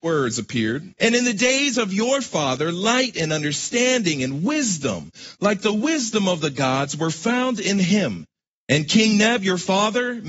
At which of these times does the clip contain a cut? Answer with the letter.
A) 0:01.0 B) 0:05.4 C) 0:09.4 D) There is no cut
A